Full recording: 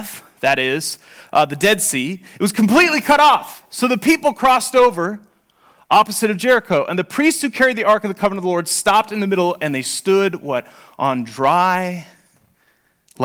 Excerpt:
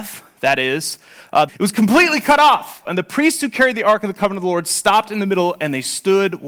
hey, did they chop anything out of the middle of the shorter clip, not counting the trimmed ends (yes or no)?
yes